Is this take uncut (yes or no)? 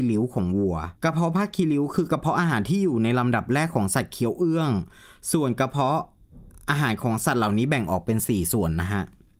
no